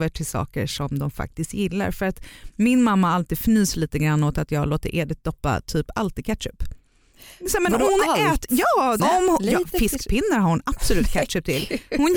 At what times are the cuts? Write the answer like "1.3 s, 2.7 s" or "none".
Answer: 9.0 s